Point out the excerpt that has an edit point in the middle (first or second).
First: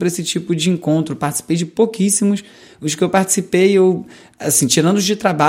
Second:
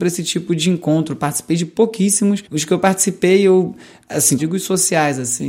second